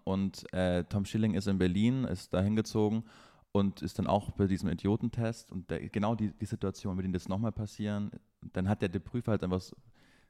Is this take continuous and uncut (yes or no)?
yes